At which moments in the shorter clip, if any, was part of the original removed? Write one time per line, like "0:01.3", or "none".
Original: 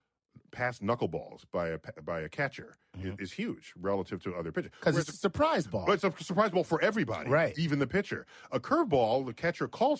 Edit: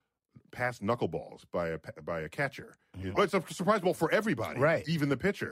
0:03.1